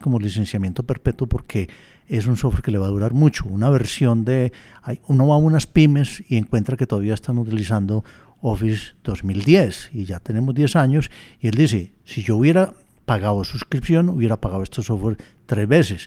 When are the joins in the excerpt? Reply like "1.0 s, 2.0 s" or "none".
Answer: none